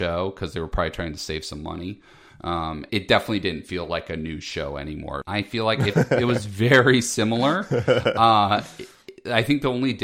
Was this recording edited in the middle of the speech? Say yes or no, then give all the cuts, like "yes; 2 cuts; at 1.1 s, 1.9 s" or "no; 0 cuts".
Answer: yes; 2 cuts; at 2.9 s, 5.2 s